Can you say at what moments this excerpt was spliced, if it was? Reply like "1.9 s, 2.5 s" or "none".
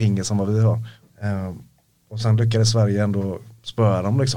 1.0 s